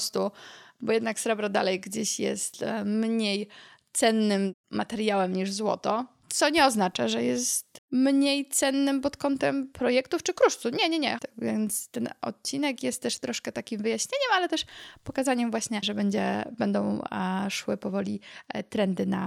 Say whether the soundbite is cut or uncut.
cut